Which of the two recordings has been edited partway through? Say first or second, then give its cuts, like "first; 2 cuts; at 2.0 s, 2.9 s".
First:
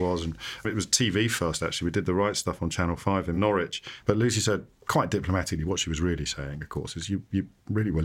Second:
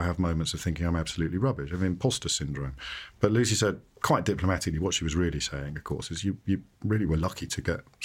first; 1 cut; at 4.0 s